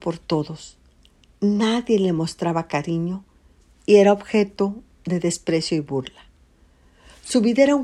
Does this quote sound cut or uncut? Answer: uncut